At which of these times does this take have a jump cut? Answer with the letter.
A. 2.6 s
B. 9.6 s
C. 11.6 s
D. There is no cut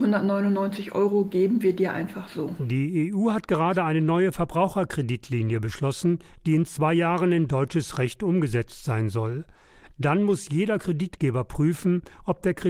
D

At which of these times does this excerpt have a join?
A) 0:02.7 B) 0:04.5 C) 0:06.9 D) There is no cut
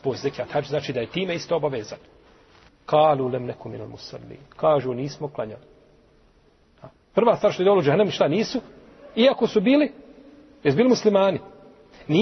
A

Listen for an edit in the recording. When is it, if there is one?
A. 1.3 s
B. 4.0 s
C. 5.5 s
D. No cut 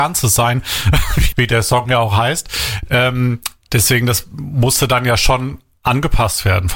A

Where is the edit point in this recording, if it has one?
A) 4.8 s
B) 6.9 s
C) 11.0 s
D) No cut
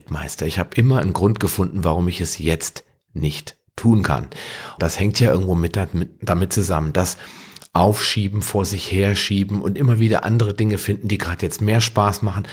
A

